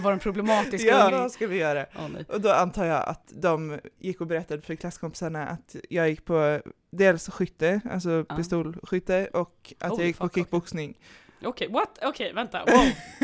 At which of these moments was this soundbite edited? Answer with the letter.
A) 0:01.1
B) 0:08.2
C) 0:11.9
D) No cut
A